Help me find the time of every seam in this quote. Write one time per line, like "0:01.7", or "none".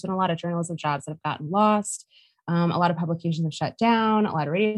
none